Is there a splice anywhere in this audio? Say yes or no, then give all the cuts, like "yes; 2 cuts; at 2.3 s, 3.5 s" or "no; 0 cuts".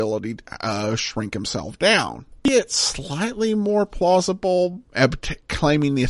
yes; 1 cut; at 4.9 s